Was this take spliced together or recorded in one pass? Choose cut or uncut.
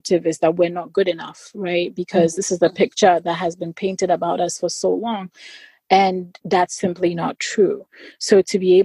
uncut